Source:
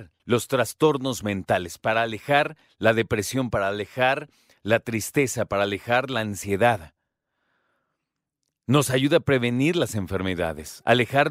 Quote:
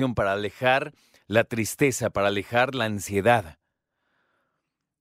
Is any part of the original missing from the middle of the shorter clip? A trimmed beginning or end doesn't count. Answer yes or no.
no